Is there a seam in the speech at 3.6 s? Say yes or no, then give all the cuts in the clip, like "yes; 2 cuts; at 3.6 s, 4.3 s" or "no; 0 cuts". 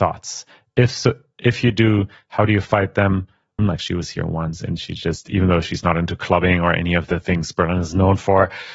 yes; 1 cut; at 3.6 s